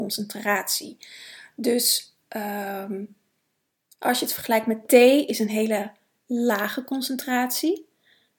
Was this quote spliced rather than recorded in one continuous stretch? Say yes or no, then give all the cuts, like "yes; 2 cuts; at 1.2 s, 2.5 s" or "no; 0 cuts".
no; 0 cuts